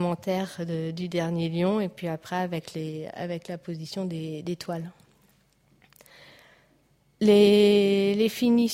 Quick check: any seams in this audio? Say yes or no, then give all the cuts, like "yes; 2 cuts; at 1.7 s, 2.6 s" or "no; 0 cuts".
no; 0 cuts